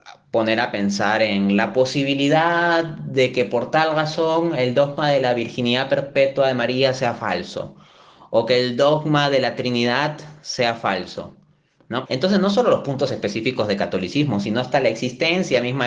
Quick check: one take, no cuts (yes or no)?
no